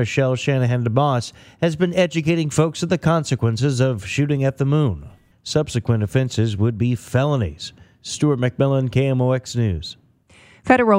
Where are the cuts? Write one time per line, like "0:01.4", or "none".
0:05.3